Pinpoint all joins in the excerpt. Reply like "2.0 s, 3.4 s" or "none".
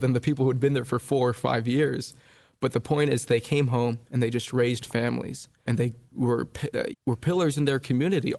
5.7 s, 6.9 s